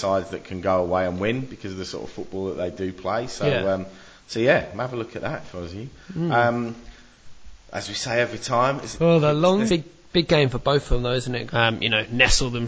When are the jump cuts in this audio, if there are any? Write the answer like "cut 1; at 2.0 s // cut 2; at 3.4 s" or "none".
cut 1; at 9.7 s // cut 2; at 11.5 s